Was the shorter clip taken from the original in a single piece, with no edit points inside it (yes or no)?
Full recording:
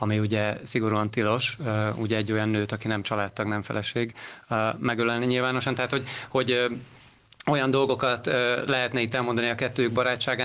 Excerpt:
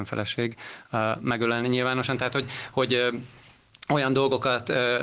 yes